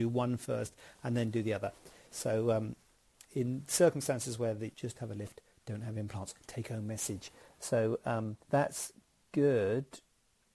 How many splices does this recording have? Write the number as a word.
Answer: two